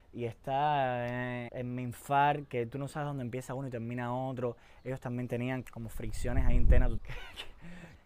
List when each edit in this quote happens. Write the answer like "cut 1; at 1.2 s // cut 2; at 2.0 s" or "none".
cut 1; at 5.6 s // cut 2; at 7.0 s